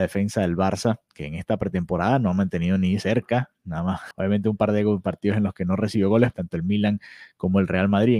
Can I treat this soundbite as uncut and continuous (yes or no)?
no